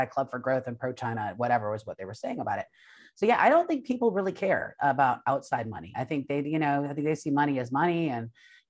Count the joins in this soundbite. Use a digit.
0